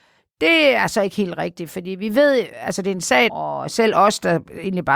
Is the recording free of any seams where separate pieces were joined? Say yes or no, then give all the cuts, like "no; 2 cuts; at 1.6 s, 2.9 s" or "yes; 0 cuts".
no; 1 cut; at 3.3 s